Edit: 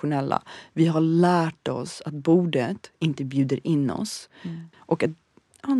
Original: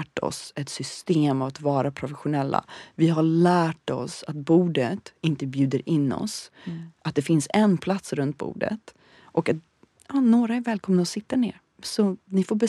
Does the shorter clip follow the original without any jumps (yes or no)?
no